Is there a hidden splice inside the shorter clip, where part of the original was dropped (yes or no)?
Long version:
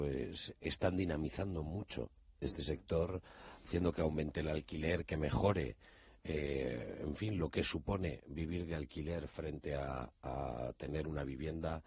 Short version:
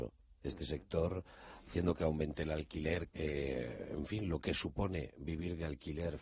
yes